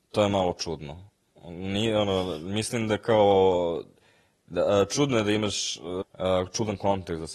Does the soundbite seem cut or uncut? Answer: cut